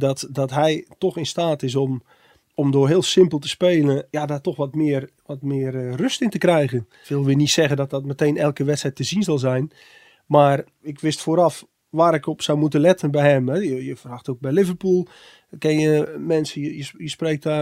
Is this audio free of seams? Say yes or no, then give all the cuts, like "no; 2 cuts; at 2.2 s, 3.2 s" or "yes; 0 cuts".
yes; 0 cuts